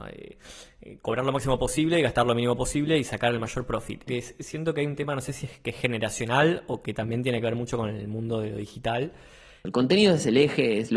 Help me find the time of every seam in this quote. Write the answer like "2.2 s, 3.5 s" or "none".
4.1 s, 9.6 s